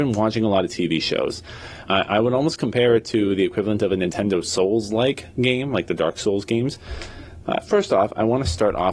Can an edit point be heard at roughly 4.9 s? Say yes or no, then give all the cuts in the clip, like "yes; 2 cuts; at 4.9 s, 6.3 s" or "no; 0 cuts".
no; 2 cuts; at 1.8 s, 7.4 s